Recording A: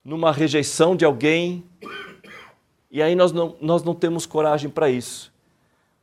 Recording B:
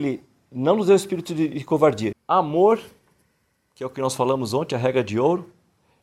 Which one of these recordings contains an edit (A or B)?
B